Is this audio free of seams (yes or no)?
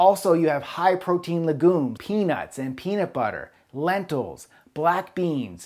no